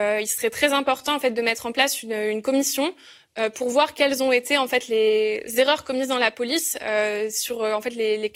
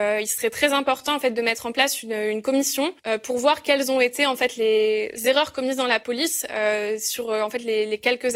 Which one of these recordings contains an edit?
second; 1 cut; at 3.0 s

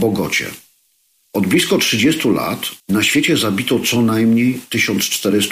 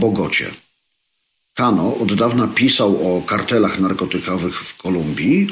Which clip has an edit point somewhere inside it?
first; 2 cuts; at 1.3 s, 2.8 s

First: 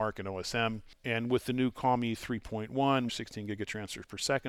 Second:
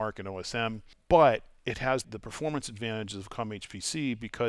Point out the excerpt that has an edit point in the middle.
first; 2 cuts; at 1.0 s, 3.1 s

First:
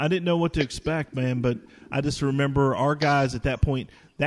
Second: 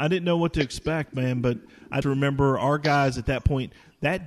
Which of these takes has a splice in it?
second; 1 cut; at 2.0 s

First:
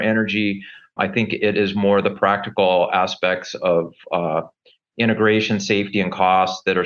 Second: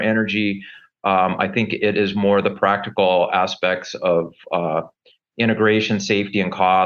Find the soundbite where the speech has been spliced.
first; 1 cut; at 1.0 s

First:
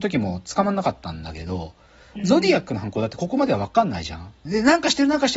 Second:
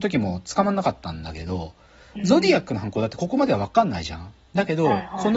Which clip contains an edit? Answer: first; 1 cut; at 4.4 s

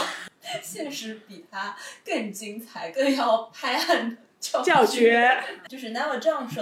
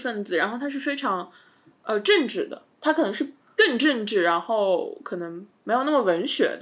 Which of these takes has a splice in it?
first; 1 cut; at 5.7 s

